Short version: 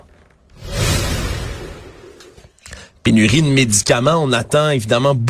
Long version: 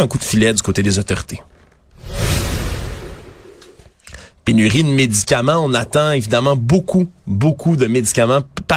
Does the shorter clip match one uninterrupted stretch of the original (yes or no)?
yes